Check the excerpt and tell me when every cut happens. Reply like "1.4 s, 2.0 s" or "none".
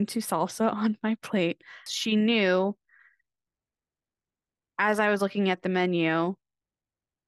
1.9 s